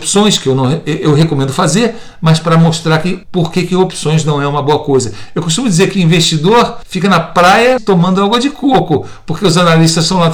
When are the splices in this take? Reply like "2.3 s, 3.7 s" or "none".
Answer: 5.3 s, 7.8 s